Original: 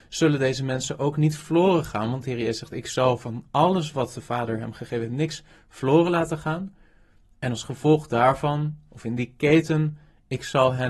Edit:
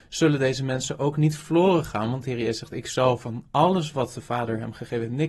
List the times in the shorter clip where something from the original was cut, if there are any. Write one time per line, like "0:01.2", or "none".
none